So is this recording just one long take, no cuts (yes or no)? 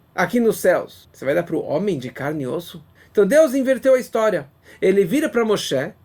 yes